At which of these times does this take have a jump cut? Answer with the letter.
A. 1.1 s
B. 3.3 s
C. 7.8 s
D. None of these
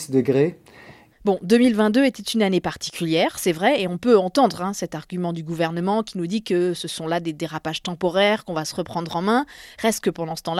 A